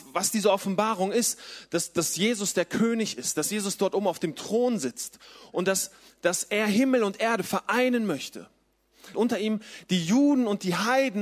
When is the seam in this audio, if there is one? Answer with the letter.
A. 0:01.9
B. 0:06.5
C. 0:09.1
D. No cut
C